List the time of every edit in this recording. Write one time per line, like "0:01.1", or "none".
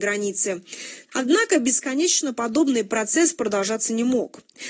0:01.1